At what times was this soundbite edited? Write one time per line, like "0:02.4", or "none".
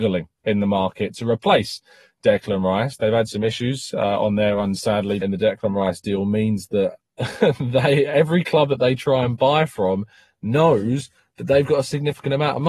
0:05.2
0:07.0